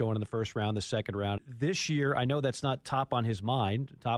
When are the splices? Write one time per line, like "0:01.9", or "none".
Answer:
0:01.4